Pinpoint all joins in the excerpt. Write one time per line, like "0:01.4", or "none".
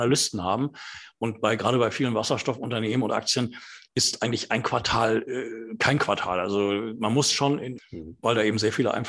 0:07.8